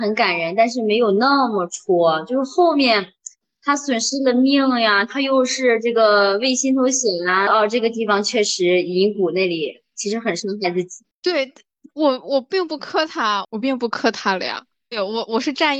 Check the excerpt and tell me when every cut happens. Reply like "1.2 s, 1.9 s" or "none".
7.5 s, 13.4 s